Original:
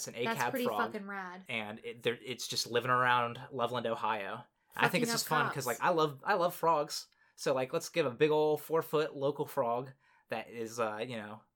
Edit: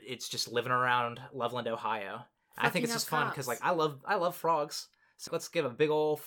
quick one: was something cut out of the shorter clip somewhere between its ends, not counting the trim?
yes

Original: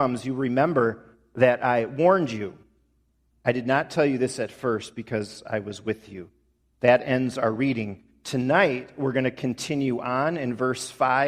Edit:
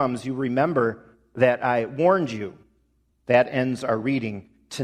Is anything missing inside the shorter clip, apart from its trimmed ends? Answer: yes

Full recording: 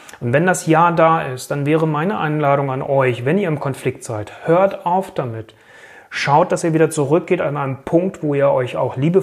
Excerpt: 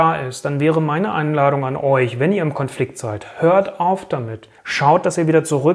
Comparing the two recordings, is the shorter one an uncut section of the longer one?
no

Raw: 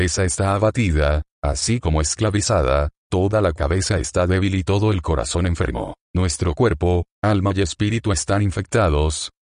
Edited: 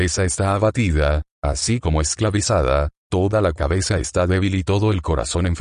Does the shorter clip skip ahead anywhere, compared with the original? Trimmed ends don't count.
no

